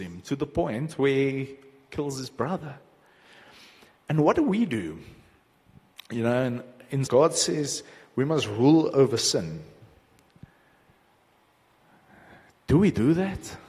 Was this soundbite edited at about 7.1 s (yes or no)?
yes